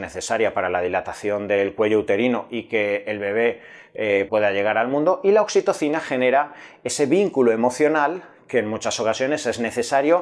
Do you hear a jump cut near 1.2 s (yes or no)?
no